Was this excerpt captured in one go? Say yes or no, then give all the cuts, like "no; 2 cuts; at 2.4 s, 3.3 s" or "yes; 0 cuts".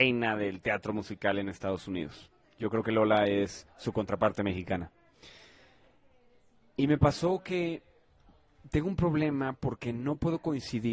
yes; 0 cuts